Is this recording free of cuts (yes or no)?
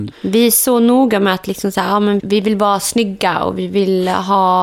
no